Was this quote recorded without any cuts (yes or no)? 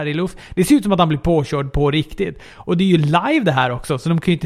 yes